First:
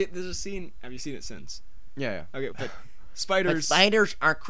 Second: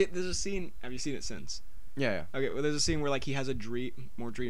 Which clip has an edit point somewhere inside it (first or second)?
first